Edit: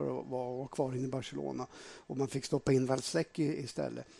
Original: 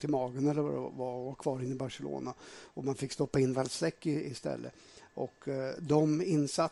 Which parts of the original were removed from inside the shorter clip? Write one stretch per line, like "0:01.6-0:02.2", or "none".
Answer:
none